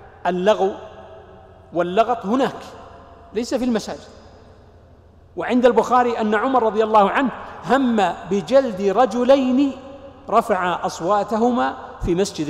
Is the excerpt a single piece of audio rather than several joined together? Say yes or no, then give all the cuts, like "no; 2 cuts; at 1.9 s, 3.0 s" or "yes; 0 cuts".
yes; 0 cuts